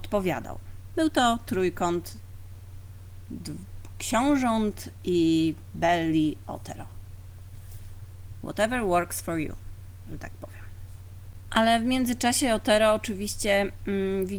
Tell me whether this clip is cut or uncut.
uncut